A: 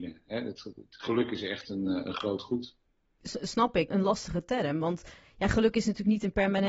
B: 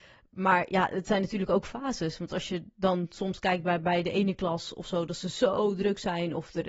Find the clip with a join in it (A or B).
A